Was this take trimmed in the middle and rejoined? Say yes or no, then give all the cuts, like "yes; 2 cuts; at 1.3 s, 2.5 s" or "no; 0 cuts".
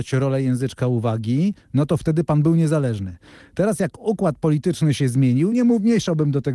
no; 0 cuts